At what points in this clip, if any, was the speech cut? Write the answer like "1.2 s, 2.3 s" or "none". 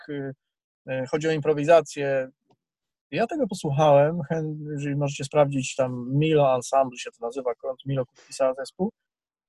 2.9 s